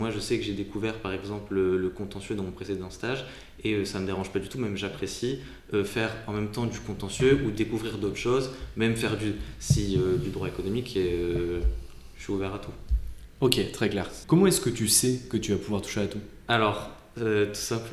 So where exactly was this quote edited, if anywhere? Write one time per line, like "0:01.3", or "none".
0:14.2